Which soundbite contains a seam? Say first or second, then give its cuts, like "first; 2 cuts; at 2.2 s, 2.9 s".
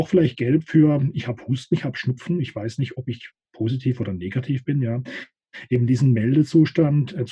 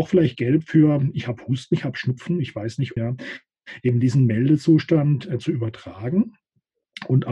second; 1 cut; at 3.0 s